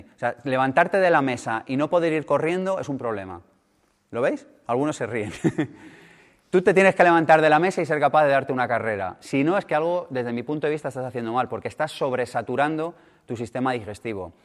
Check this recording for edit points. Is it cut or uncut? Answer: uncut